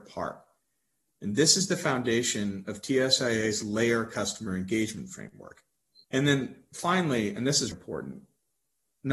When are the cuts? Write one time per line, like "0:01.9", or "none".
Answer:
0:06.0
0:07.7